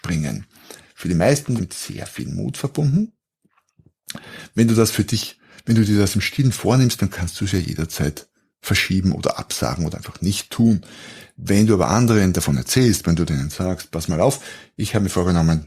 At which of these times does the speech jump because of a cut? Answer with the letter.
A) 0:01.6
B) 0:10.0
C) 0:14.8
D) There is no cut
A